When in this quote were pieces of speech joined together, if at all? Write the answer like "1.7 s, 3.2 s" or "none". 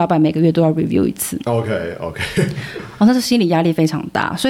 none

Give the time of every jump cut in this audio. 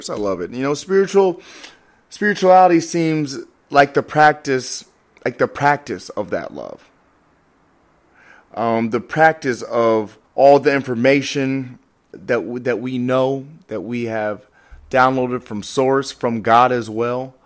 10.3 s, 12.1 s

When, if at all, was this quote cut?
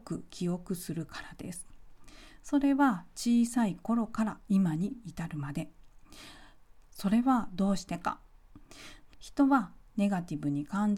6.8 s, 9.1 s

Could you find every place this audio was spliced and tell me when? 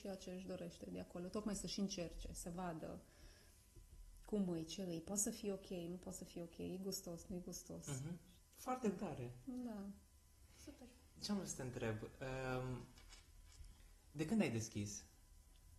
8.4 s

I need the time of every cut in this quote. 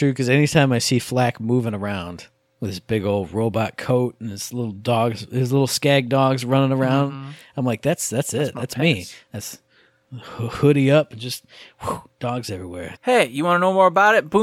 13.0 s

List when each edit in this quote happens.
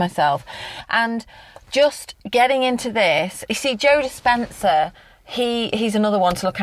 none

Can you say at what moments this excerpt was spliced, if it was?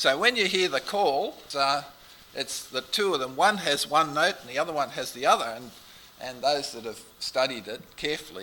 1.5 s

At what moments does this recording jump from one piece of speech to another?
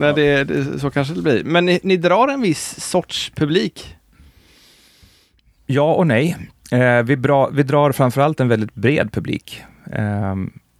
6.6 s

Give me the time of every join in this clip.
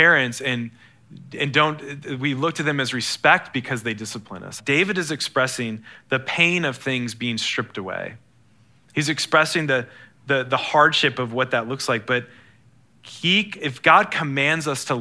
4.6 s

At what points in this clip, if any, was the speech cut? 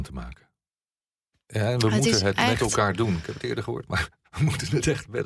1.3 s

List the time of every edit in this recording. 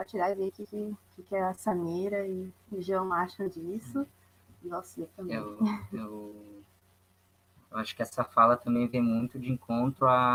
none

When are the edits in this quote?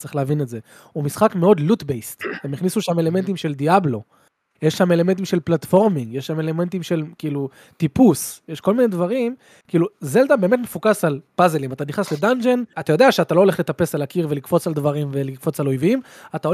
12.7 s

